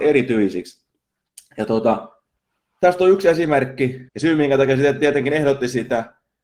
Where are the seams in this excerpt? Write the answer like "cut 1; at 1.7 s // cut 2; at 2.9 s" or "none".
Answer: cut 1; at 4.1 s